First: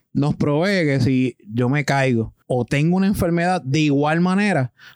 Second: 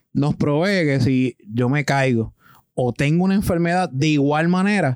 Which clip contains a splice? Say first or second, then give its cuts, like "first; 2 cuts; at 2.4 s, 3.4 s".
first; 1 cut; at 2.4 s